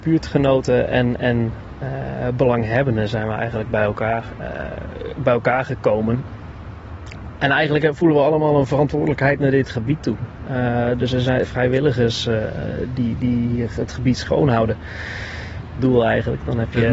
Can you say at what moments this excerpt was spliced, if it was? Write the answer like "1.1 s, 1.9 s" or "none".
11.4 s, 15.8 s